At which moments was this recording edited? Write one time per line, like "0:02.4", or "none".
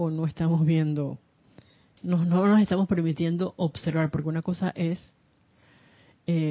none